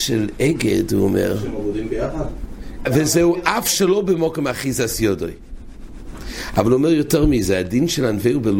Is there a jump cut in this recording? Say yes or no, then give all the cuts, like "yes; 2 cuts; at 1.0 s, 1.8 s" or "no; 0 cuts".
yes; 1 cut; at 2.9 s